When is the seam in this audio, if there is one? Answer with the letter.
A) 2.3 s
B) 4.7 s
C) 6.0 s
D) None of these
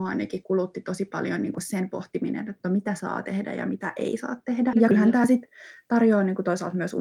B